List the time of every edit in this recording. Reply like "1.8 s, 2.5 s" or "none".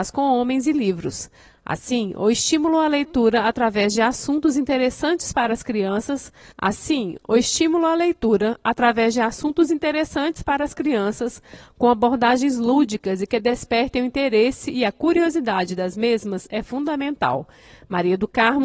none

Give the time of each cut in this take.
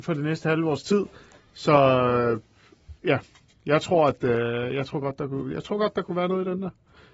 none

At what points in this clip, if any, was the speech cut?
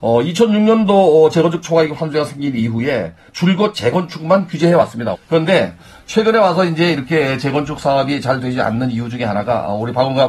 5.1 s

